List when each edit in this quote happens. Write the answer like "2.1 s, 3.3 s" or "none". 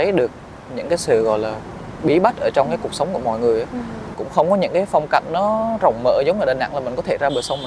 4.1 s